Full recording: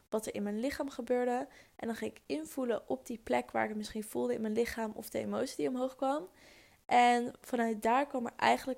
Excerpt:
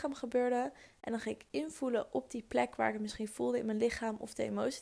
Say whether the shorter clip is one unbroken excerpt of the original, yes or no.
yes